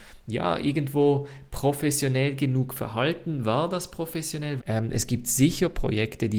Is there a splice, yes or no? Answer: yes